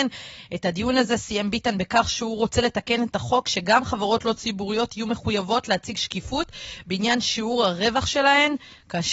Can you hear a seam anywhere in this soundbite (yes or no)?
no